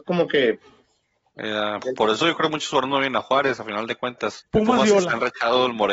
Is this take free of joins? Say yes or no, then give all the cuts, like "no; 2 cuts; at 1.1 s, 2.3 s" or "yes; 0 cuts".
no; 2 cuts; at 1.8 s, 4.4 s